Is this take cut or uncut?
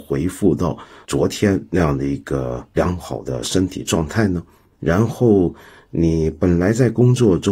uncut